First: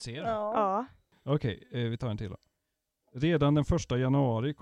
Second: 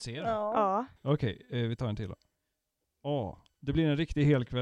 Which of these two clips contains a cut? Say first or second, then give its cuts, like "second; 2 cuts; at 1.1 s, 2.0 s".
second; 2 cuts; at 1.0 s, 2.8 s